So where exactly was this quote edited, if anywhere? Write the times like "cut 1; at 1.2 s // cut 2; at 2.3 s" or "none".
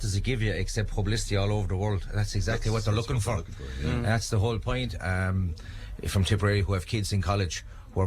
cut 1; at 5.0 s